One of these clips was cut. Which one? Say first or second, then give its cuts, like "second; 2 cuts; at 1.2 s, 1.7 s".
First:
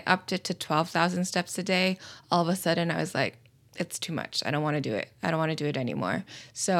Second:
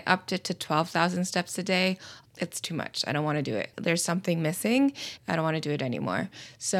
second; 3 cuts; at 2.3 s, 3.7 s, 5.2 s